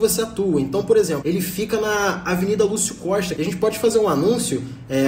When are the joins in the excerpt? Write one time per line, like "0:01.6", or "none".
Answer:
0:01.2
0:03.4